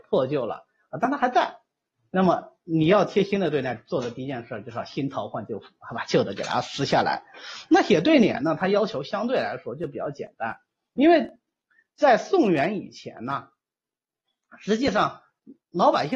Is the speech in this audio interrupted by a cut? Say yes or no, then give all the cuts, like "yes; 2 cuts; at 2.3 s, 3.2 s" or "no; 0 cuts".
no; 0 cuts